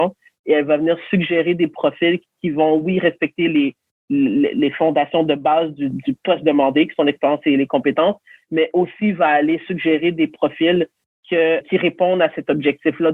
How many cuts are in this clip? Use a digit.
2